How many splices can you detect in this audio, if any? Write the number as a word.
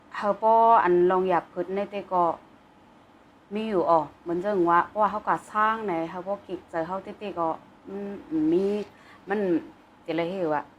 zero